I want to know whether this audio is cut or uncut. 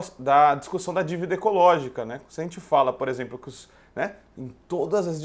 uncut